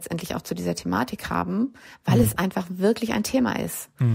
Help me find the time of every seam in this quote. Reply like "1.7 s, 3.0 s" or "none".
none